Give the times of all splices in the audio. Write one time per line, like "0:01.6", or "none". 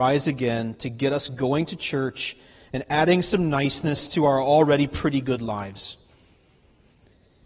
none